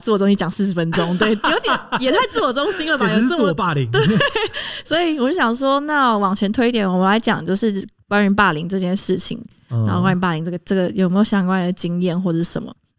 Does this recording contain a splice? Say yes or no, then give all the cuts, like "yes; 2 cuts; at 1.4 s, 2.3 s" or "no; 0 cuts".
no; 0 cuts